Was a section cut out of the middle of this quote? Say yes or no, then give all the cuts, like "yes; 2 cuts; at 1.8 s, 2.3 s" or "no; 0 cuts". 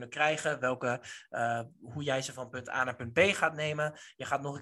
no; 0 cuts